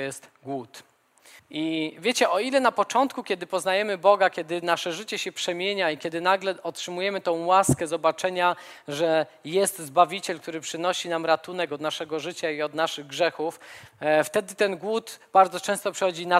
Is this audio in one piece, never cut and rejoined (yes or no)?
no